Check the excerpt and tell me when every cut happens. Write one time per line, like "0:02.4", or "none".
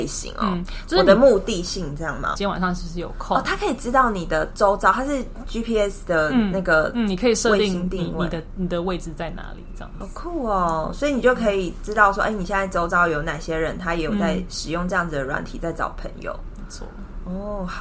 0:02.4